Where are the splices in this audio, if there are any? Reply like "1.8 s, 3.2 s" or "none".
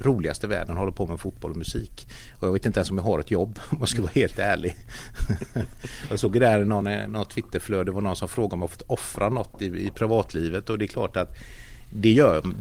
none